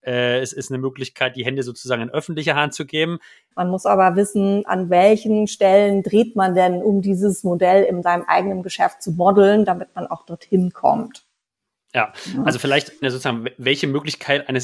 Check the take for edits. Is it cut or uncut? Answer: cut